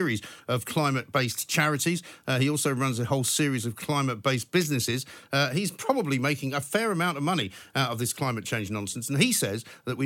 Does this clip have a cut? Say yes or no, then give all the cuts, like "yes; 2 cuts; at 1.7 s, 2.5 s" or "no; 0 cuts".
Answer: no; 0 cuts